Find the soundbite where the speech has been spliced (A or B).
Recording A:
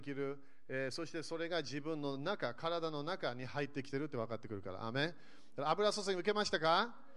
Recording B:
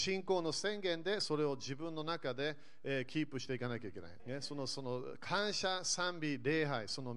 B